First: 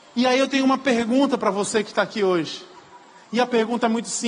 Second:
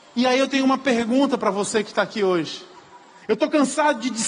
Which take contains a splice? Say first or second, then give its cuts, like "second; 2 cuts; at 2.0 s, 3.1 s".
second; 1 cut; at 3.2 s